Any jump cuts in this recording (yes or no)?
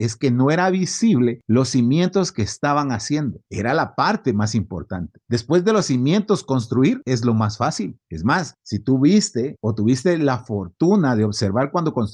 no